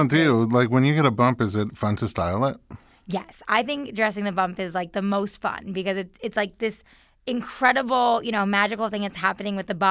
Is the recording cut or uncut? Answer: uncut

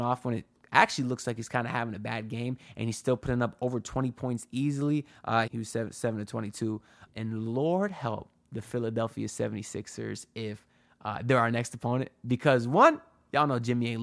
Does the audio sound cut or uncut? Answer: cut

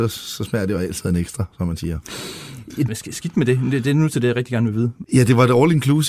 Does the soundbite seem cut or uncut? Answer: cut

